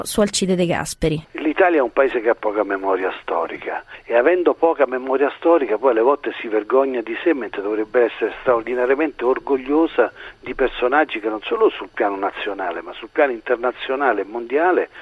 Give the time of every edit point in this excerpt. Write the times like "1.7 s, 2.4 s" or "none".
1.3 s